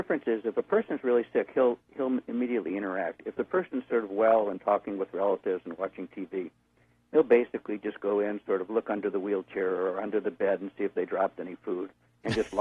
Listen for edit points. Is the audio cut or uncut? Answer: uncut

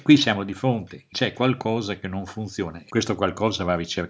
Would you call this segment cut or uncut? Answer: cut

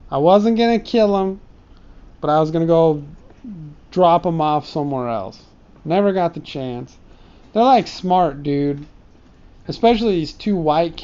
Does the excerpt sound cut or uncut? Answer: uncut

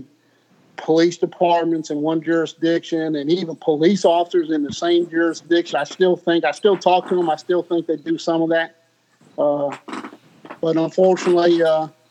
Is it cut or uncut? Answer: cut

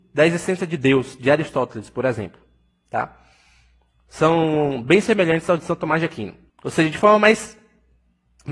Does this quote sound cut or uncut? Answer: cut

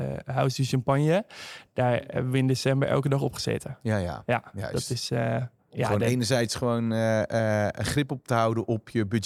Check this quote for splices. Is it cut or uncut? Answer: uncut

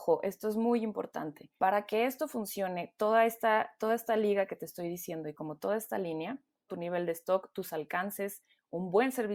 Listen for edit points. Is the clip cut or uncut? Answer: cut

